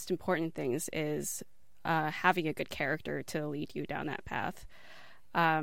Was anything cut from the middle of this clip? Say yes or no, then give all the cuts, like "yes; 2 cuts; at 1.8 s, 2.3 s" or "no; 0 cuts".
no; 0 cuts